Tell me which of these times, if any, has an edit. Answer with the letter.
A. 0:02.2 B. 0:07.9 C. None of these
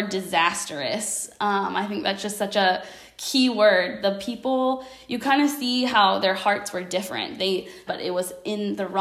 B